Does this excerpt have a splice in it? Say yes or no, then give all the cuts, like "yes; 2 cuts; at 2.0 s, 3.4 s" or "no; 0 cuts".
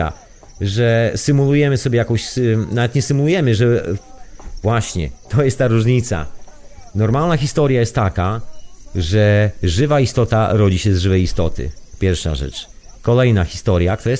no; 0 cuts